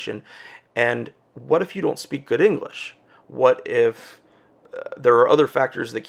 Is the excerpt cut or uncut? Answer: uncut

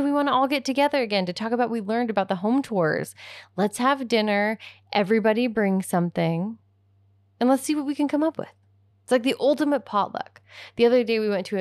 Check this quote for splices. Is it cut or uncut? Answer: uncut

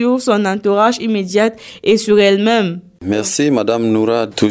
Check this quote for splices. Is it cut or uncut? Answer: uncut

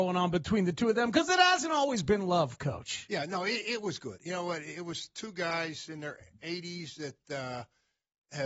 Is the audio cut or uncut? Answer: uncut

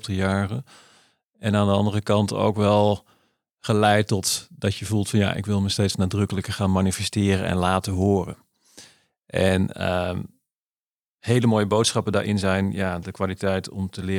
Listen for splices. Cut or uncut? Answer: uncut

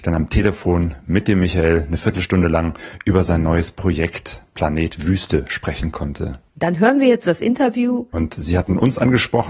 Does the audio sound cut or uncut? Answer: cut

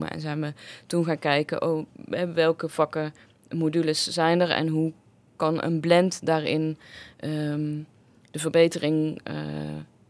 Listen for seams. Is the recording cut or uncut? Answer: uncut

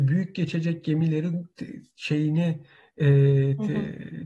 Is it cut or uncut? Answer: uncut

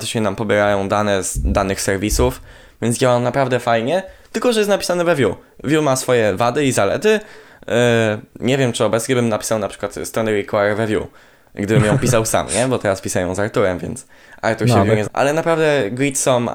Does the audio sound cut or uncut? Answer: cut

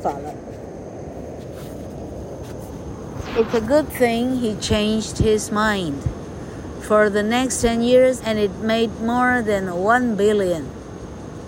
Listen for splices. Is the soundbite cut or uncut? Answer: cut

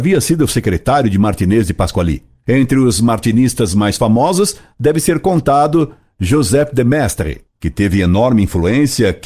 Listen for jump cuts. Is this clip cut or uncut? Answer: uncut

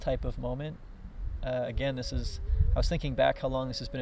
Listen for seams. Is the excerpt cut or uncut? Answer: uncut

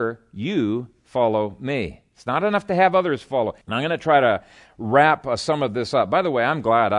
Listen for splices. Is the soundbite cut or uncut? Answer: cut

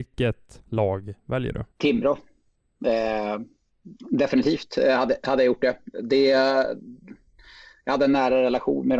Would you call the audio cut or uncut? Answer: cut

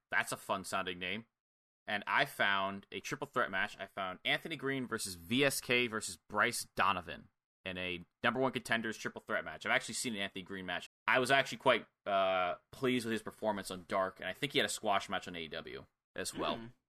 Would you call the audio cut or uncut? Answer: cut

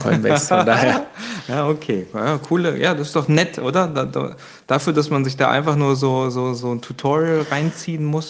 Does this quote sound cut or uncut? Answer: uncut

